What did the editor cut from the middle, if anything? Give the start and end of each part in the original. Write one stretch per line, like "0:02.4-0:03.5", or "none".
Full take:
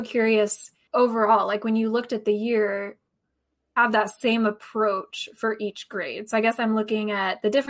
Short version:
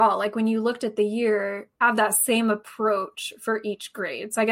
0:03.0-0:03.7